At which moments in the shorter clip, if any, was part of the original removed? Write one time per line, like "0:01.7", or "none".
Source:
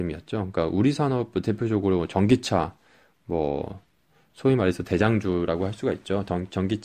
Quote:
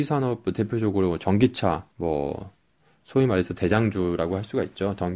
0:01.9